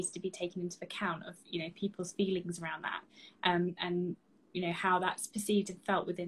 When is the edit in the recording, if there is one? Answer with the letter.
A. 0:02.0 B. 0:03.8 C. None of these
B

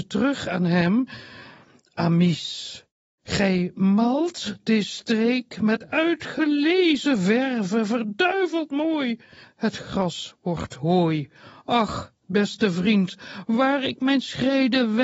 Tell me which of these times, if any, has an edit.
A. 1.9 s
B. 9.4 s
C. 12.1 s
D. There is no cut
B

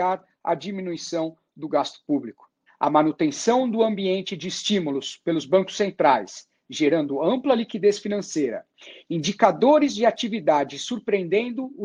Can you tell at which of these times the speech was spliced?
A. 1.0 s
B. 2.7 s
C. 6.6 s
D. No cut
B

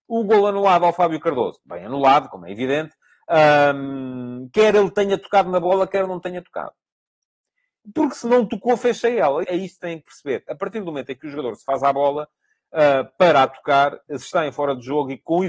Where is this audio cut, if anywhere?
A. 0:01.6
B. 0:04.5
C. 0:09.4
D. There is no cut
C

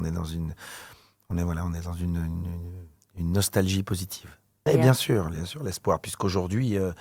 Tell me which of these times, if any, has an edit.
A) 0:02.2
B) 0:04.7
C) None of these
B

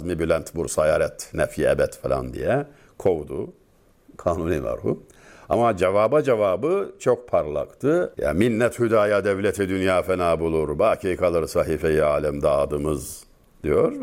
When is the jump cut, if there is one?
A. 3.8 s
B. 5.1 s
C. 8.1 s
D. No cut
C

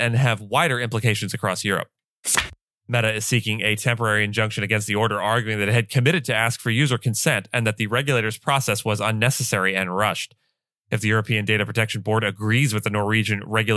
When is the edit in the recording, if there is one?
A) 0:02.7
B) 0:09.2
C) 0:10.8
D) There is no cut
A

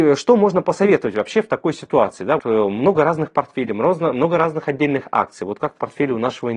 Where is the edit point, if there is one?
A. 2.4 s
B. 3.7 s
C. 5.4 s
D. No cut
A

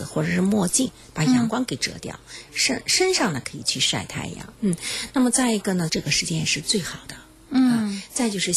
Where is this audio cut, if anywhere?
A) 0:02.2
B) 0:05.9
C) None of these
B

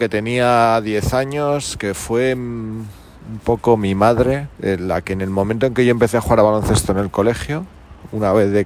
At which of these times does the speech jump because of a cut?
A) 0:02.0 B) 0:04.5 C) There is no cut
B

